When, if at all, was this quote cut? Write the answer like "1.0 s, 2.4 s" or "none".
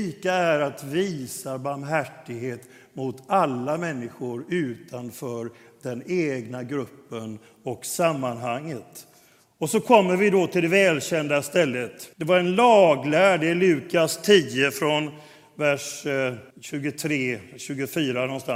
12.1 s, 16.5 s